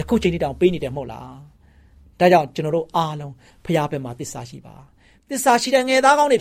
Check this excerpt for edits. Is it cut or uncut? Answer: uncut